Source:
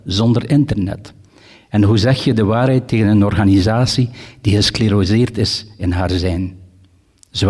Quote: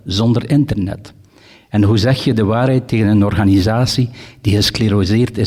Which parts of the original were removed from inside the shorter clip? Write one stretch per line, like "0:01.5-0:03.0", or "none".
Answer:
none